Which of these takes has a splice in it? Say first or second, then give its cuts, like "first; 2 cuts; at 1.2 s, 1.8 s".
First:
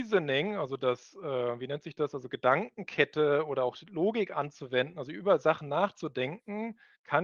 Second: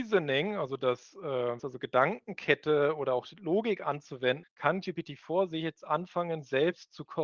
second; 2 cuts; at 1.6 s, 4.4 s